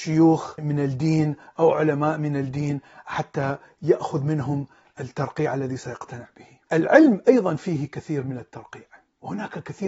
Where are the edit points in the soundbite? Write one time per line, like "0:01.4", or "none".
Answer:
0:06.7